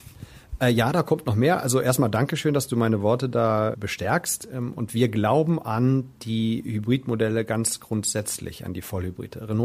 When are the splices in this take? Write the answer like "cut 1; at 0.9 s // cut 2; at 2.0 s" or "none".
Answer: none